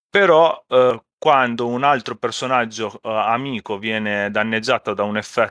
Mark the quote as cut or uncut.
uncut